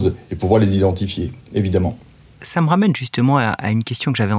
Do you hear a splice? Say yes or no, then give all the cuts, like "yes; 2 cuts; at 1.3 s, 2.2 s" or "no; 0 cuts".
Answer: no; 0 cuts